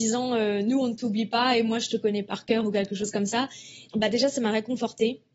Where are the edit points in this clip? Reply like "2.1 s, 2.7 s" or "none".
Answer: 3.9 s